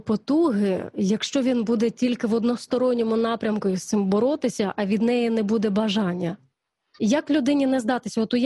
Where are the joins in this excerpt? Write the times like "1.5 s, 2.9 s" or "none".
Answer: 7.0 s